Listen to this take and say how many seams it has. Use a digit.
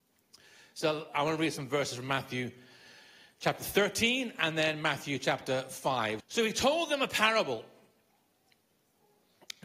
1